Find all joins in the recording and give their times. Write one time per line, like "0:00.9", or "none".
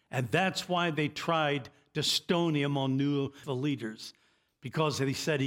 0:03.4

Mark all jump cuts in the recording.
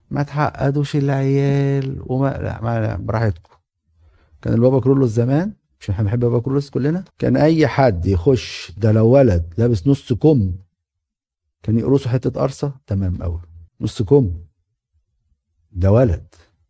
0:07.1
0:13.7

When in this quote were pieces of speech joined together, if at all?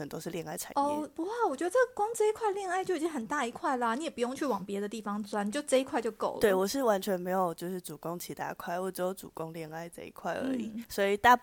none

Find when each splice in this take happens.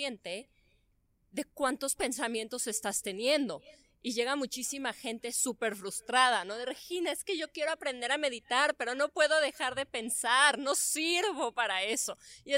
none

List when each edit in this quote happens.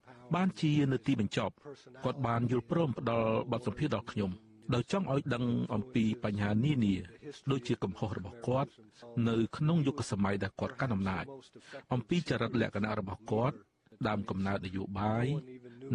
none

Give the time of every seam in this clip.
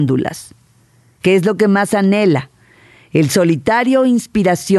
none

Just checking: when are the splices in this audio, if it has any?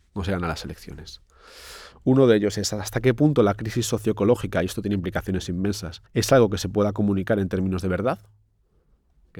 0:01.9
0:06.1

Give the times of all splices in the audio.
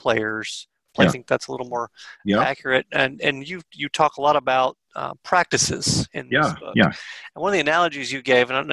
0:01.1

